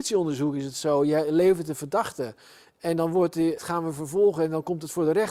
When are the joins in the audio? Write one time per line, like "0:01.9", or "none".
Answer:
0:03.6